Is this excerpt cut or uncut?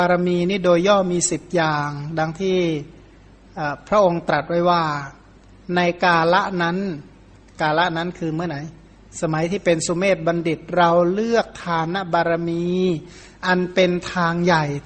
uncut